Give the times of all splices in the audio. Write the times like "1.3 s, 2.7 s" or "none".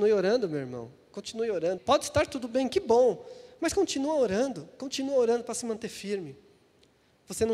1.8 s